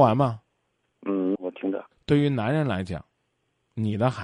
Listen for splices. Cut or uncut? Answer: cut